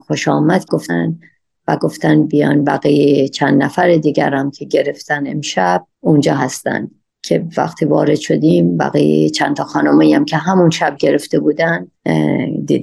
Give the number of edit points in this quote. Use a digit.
1